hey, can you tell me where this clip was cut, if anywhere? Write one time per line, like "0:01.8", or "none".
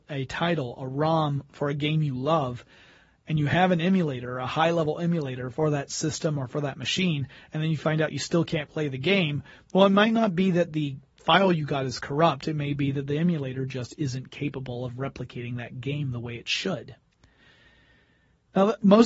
none